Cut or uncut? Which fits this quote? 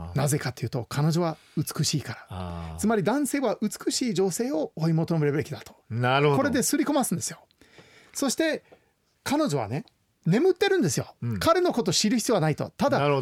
uncut